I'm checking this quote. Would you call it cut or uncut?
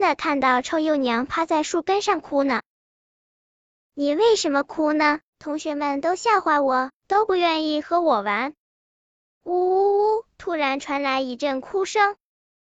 cut